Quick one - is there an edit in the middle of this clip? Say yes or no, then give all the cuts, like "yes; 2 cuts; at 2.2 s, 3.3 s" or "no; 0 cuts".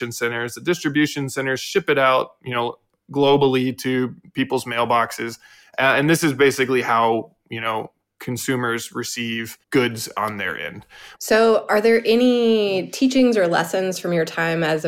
yes; 2 cuts; at 9.6 s, 11.1 s